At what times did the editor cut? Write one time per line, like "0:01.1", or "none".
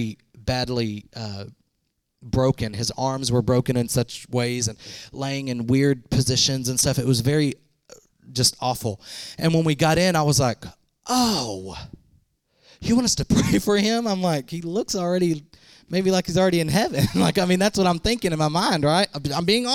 none